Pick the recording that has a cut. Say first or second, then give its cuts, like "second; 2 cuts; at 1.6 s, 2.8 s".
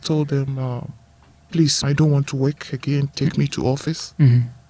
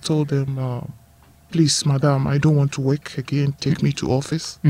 first; 1 cut; at 1.8 s